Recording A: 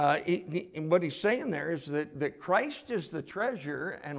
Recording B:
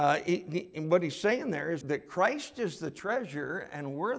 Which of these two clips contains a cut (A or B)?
B